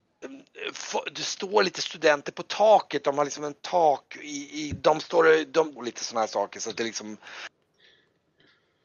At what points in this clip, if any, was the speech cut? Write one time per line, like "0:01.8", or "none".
0:04.7
0:05.8